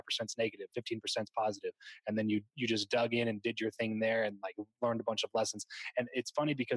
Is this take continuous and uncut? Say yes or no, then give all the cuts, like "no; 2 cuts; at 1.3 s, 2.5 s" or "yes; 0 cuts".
yes; 0 cuts